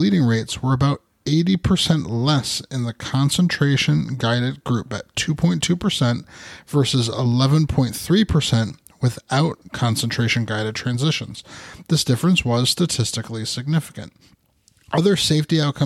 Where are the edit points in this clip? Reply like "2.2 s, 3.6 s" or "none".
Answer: none